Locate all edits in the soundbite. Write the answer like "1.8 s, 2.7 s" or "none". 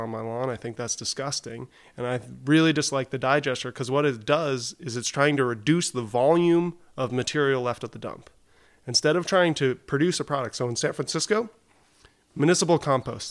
none